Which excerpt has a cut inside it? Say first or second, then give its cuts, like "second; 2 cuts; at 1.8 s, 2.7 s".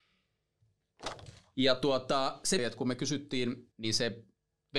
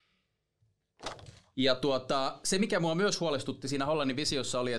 first; 2 cuts; at 2.6 s, 3.7 s